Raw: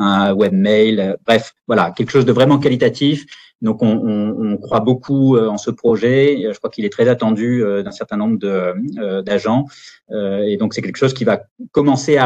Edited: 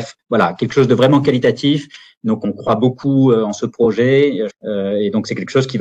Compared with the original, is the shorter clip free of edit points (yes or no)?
no